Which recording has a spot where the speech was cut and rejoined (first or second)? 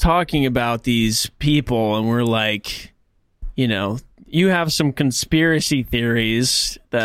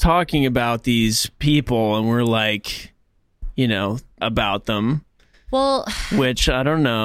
second